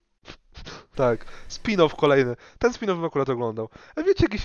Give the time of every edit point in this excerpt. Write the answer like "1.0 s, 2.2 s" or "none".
0.9 s